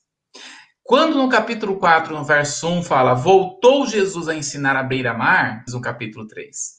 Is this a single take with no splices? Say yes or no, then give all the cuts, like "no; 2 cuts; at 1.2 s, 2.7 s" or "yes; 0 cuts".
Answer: no; 1 cut; at 5.7 s